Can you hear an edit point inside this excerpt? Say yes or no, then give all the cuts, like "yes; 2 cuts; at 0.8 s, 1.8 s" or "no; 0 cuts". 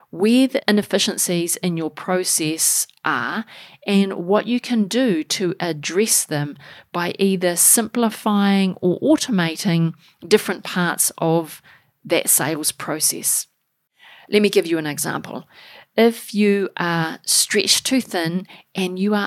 no; 0 cuts